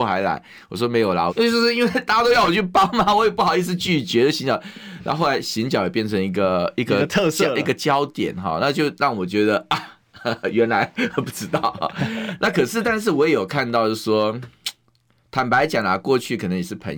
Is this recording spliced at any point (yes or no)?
yes